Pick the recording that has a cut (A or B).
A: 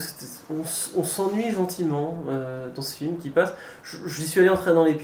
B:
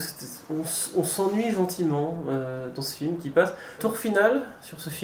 B